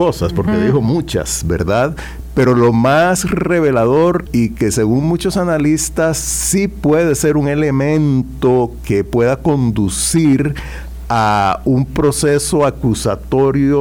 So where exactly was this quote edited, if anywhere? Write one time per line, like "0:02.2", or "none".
0:04.3